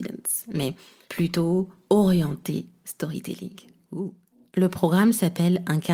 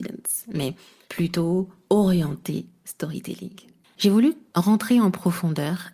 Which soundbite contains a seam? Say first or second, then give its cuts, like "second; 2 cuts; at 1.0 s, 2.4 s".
second; 1 cut; at 3.8 s